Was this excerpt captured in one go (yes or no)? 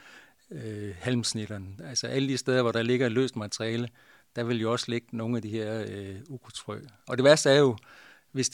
yes